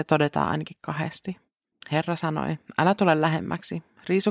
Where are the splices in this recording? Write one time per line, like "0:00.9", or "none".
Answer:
0:01.7